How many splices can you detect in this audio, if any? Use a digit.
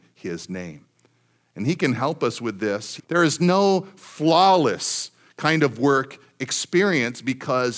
1